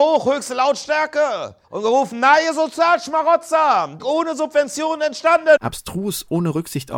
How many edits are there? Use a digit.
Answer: 3